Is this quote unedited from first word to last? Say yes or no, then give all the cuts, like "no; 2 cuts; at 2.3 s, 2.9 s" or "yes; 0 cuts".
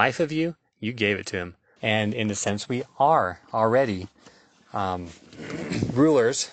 no; 1 cut; at 1.8 s